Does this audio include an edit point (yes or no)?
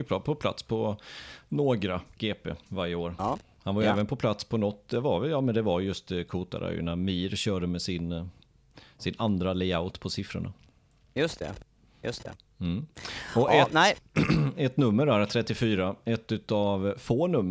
no